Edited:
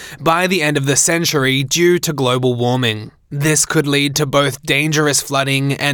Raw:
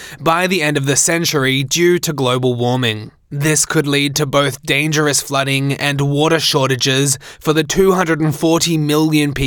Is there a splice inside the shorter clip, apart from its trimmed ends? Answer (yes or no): no